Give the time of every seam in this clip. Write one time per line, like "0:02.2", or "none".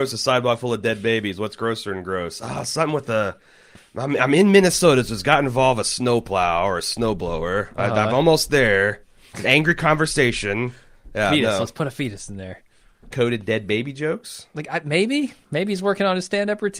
0:13.1